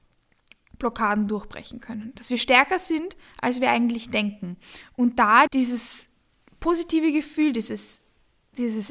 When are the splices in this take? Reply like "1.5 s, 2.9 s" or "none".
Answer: 5.5 s